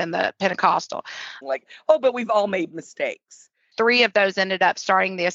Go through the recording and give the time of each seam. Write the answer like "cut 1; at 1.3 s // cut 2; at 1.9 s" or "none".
cut 1; at 1.4 s // cut 2; at 3.7 s

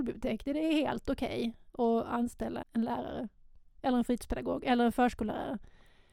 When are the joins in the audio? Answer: cut 1; at 2.6 s

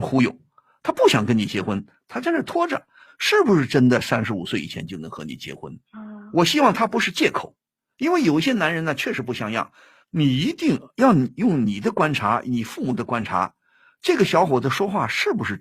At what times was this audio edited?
cut 1; at 3.1 s // cut 2; at 5.9 s // cut 3; at 10.0 s

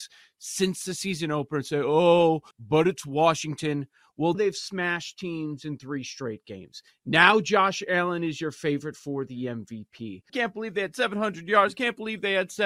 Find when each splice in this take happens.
cut 1; at 2.5 s // cut 2; at 4.3 s // cut 3; at 10.3 s

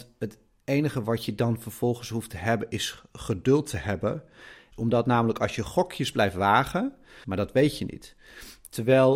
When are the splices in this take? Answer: cut 1; at 4.7 s // cut 2; at 7.2 s

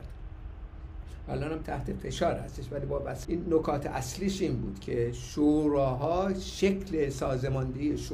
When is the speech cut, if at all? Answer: cut 1; at 3.2 s

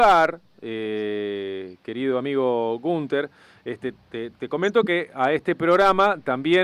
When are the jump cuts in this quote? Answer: cut 1; at 4.3 s

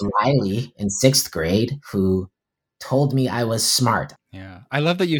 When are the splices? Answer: cut 1; at 4.1 s

